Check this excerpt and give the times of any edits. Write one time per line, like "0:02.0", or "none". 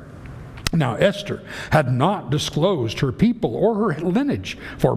none